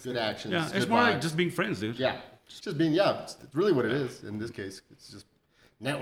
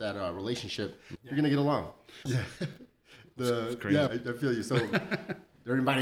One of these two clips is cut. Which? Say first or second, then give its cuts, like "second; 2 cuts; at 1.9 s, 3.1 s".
second; 3 cuts; at 1.2 s, 2.3 s, 4.1 s